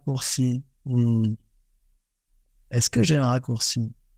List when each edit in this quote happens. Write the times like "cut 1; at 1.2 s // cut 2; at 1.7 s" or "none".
none